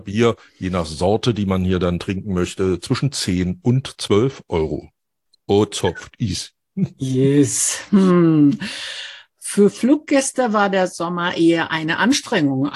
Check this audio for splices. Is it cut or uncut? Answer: uncut